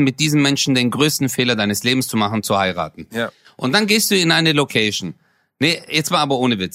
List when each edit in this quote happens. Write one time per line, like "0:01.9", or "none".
none

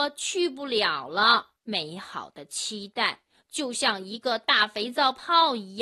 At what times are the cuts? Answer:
0:01.6

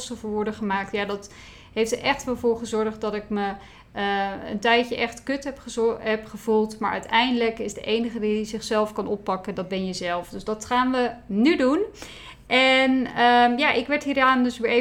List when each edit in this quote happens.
none

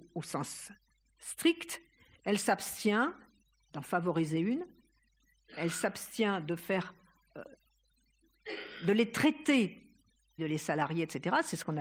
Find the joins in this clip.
0:02.2
0:10.4

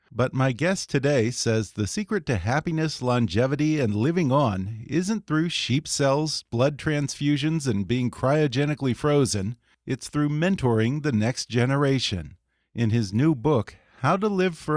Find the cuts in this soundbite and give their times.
none

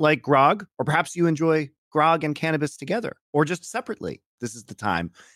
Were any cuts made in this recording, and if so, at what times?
0:03.2
0:04.4

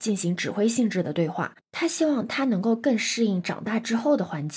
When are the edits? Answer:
0:01.6

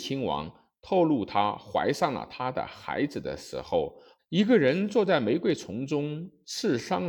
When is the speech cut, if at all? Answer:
0:04.2

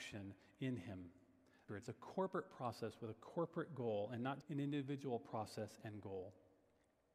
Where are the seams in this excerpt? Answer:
0:01.7
0:04.4

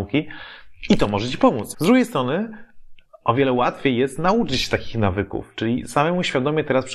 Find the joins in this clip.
0:01.7
0:03.0

